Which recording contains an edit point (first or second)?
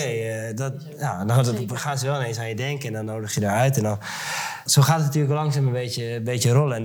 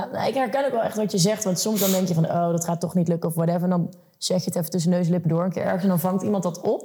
first